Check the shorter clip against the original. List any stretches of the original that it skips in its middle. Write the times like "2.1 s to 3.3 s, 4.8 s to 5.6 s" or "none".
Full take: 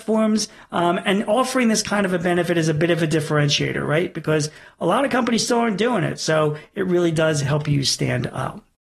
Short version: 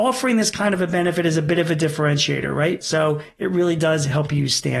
4.1 s to 6.2 s